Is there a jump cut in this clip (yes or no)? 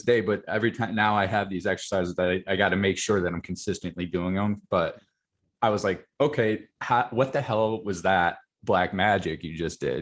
no